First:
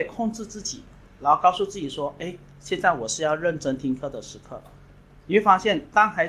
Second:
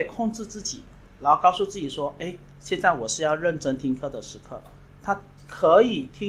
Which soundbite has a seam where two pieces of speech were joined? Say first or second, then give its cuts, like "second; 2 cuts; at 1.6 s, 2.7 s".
second; 1 cut; at 4.9 s